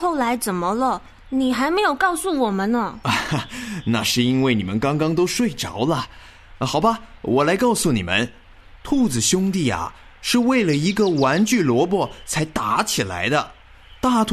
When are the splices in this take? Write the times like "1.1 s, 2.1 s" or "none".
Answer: none